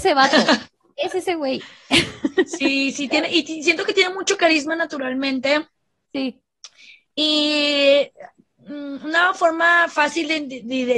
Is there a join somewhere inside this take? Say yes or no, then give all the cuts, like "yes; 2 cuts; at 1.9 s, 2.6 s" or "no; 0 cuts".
no; 0 cuts